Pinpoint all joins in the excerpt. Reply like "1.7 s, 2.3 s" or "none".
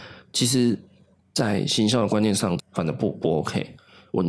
1.2 s, 2.6 s